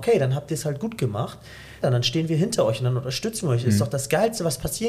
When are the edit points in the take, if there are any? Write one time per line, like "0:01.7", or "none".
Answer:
0:01.8